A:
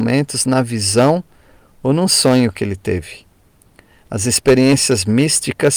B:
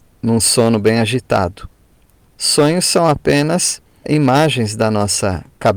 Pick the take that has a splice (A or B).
B